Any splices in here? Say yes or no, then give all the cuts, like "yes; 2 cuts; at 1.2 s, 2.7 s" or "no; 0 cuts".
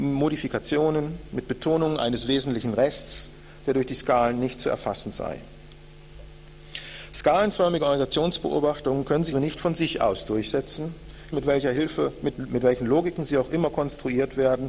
yes; 3 cuts; at 9.3 s, 11.3 s, 12.3 s